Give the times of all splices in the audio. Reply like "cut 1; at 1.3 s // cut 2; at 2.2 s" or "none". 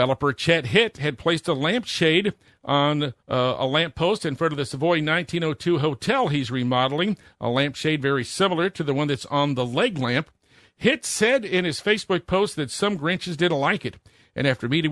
cut 1; at 3.2 s